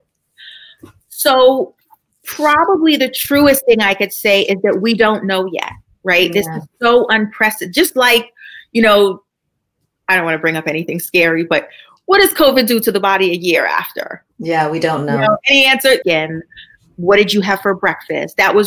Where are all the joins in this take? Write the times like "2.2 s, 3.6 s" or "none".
16.0 s